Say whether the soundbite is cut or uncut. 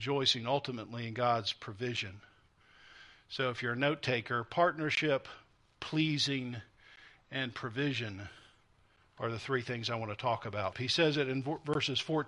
cut